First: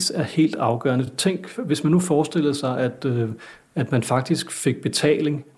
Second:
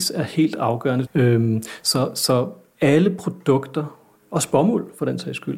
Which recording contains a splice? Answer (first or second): second